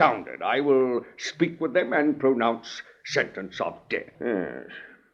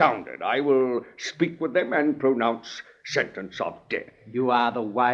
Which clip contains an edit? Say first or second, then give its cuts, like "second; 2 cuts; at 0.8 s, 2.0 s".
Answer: first; 1 cut; at 4.1 s